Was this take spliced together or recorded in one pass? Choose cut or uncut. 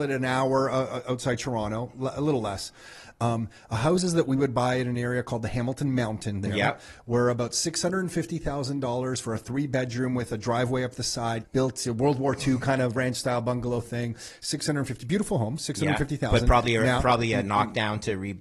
cut